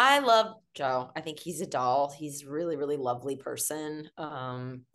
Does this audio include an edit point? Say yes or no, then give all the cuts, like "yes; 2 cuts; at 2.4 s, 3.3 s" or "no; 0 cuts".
no; 0 cuts